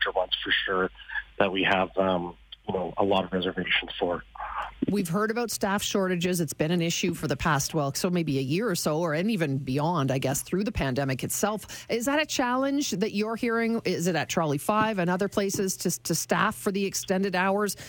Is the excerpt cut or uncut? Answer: cut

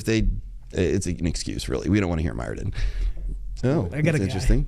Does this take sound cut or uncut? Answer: cut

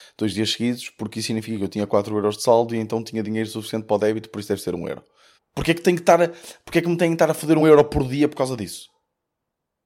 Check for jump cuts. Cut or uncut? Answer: cut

